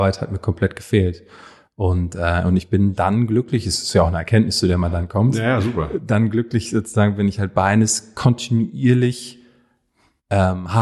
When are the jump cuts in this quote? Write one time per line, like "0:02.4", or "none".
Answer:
none